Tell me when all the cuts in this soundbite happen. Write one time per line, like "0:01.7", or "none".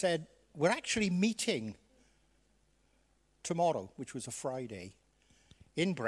none